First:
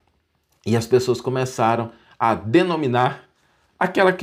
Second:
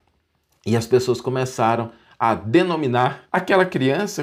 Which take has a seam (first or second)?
second